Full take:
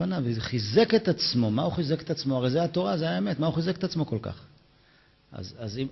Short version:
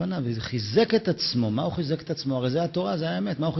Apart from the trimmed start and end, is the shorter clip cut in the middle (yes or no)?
no